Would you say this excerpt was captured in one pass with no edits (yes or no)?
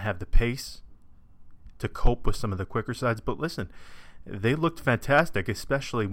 no